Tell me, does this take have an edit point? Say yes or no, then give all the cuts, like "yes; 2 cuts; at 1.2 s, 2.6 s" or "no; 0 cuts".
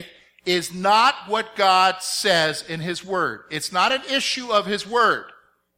no; 0 cuts